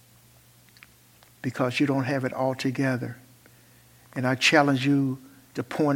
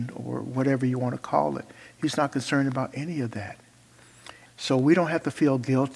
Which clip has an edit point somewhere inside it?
second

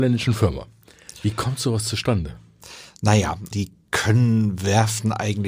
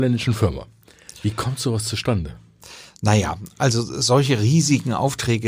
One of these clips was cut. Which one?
first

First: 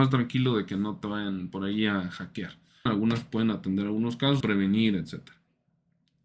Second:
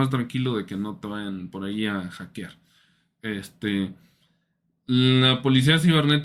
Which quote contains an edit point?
first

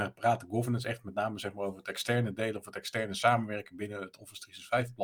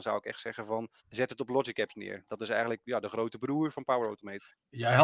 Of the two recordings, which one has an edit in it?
second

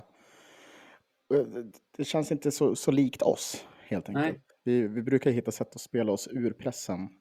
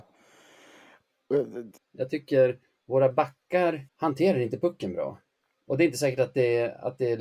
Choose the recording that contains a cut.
second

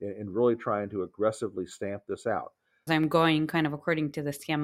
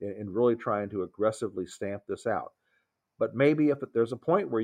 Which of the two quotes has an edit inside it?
first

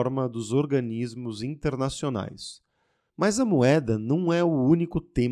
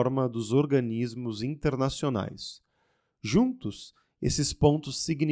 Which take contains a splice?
first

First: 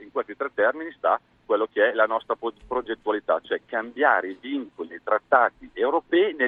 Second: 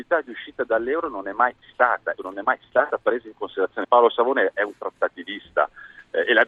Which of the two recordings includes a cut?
second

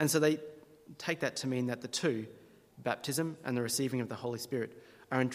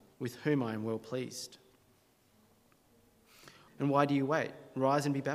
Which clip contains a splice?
second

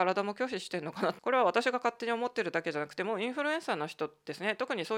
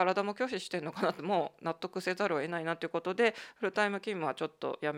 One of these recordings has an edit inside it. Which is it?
first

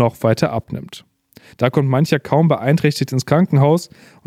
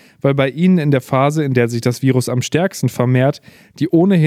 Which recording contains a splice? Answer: first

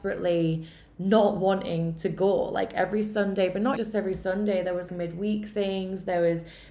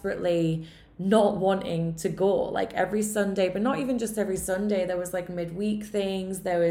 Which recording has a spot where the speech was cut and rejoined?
first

